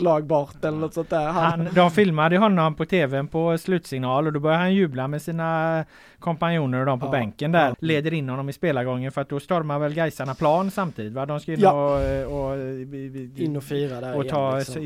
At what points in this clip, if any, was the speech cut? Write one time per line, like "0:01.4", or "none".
0:07.7